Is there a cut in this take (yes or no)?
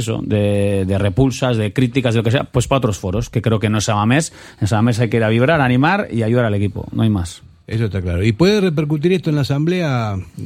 no